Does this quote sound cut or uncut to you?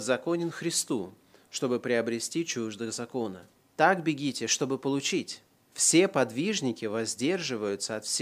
cut